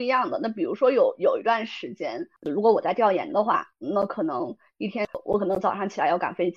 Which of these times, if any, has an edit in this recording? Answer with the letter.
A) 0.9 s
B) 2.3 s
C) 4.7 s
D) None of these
D